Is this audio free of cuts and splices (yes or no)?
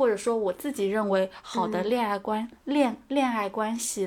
yes